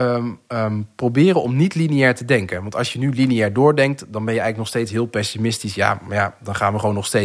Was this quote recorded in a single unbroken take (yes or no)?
yes